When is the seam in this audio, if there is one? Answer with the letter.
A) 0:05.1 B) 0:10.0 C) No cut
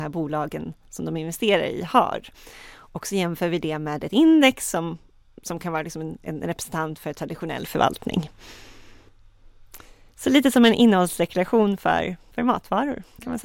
C